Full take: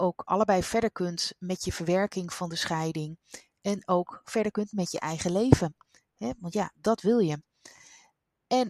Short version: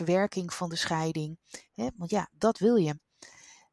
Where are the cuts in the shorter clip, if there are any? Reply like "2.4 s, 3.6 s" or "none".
1.7 s